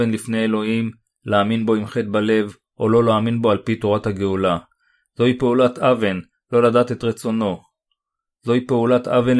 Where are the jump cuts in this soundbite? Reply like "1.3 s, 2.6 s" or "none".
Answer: none